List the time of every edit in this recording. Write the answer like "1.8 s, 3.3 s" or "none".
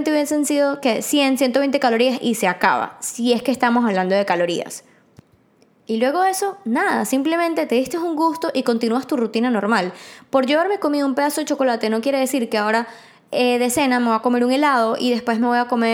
none